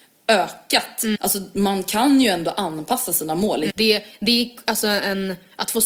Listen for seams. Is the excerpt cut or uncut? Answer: cut